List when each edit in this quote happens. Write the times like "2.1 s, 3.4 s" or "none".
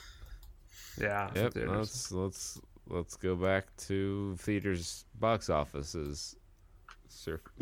1.4 s